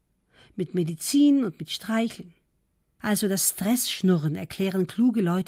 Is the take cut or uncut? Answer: cut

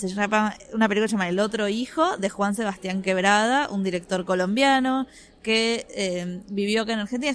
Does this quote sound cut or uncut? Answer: uncut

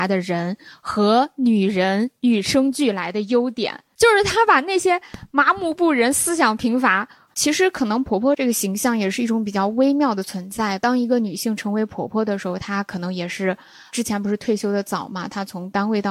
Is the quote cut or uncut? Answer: cut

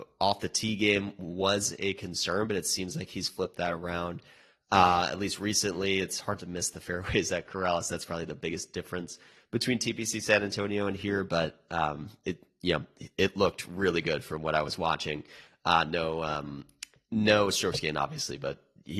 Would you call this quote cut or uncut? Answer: uncut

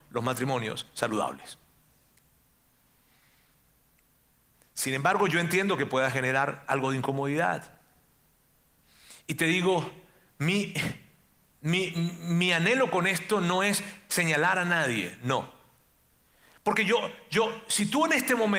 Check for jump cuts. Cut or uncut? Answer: uncut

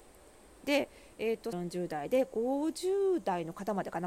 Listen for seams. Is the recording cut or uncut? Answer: cut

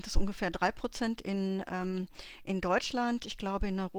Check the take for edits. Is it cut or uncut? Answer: uncut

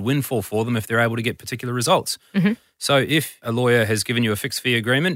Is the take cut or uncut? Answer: uncut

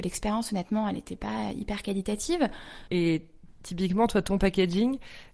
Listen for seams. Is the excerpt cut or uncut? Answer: cut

